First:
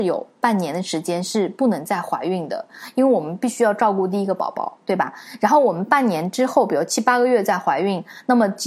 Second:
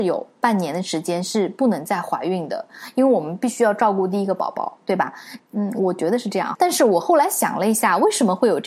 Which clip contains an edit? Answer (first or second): second